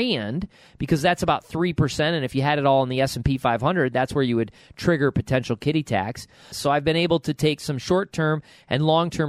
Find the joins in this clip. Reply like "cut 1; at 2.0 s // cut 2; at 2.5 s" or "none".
cut 1; at 6.5 s